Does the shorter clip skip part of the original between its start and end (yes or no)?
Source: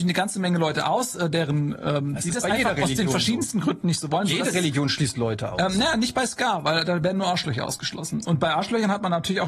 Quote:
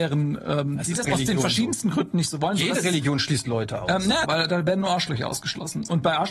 yes